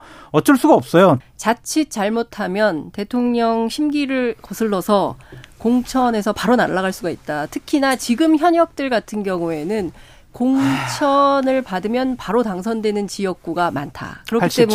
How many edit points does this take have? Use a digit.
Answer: 1